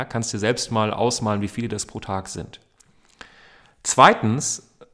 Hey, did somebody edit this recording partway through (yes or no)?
no